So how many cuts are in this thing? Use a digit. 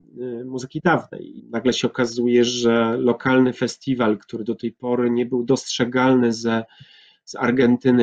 1